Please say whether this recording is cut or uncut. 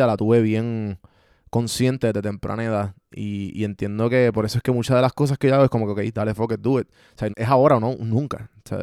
cut